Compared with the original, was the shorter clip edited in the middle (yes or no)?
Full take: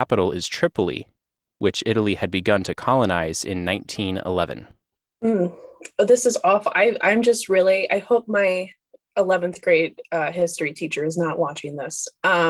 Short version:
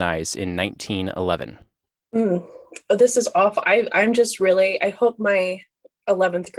no